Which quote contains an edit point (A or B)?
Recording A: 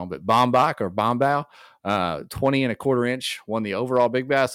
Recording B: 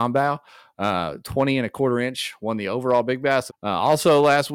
B